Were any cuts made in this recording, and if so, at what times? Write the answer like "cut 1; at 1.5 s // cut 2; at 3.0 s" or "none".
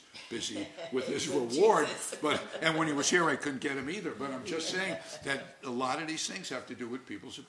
none